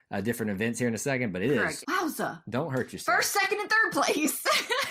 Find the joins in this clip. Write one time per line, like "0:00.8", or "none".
0:01.8